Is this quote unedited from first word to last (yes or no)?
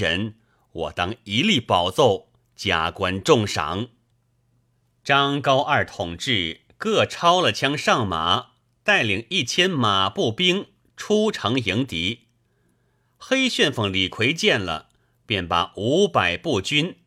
yes